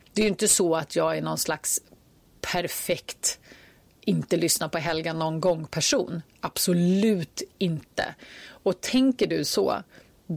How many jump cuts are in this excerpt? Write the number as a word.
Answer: zero